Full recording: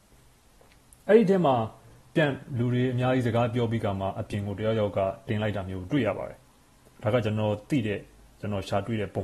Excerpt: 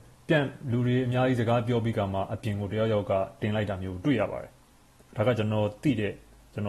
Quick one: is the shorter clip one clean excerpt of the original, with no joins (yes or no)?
yes